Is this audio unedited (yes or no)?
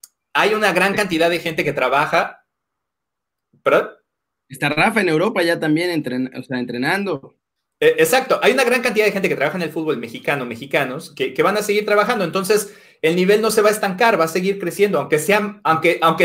yes